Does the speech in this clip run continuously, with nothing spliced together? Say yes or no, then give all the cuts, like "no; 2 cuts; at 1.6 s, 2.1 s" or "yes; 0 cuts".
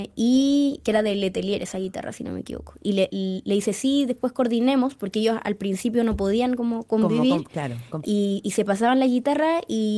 no; 1 cut; at 8.0 s